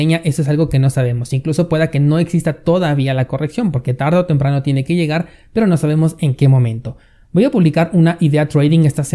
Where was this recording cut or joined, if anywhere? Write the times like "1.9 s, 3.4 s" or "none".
none